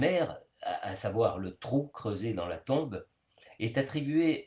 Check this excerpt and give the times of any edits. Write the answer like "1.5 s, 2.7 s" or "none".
none